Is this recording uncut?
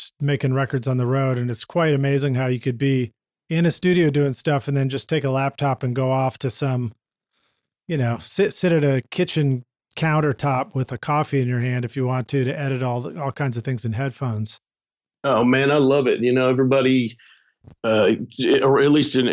yes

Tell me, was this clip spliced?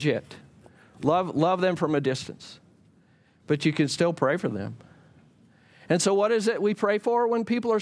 no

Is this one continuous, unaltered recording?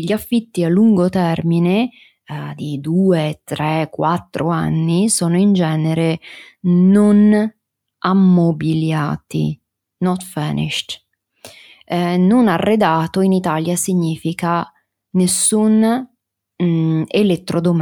yes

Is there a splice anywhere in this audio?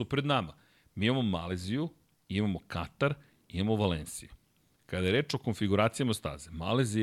no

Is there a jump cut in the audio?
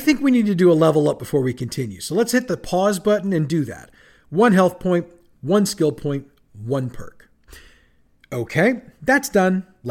no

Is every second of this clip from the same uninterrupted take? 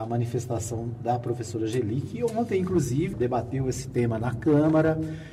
no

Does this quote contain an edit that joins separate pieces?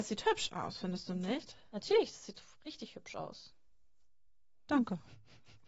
no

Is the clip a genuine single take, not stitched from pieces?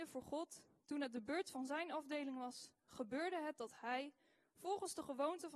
yes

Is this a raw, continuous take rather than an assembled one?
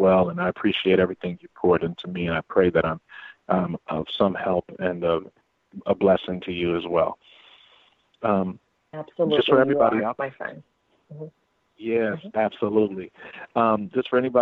yes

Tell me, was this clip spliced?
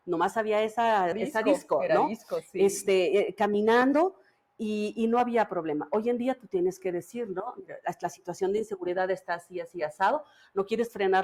yes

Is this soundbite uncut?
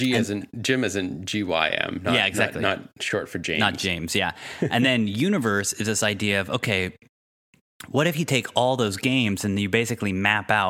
yes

